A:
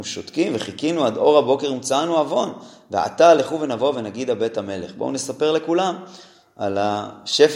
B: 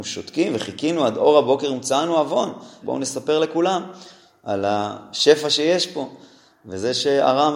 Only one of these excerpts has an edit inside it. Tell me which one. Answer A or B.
B